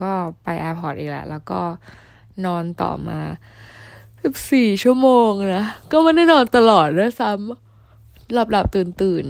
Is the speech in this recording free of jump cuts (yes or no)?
yes